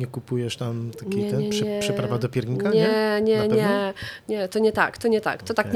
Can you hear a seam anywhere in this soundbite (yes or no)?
no